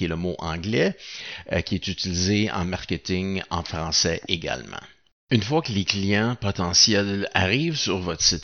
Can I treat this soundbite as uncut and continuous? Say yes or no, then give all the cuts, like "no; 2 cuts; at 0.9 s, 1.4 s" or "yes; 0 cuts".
yes; 0 cuts